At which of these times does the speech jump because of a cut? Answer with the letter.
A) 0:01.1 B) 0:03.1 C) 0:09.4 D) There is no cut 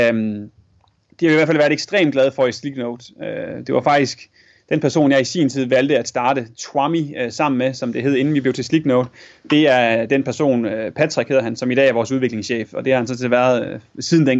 D